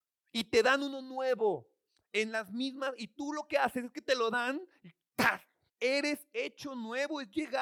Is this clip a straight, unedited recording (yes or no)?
no